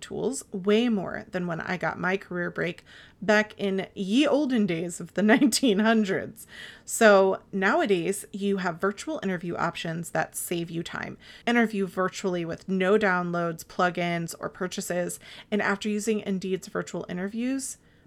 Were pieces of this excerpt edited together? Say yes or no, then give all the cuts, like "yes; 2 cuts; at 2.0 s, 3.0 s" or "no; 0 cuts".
yes; 1 cut; at 11.4 s